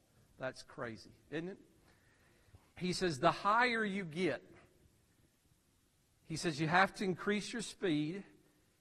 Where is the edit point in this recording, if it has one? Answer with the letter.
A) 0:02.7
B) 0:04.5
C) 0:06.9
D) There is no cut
A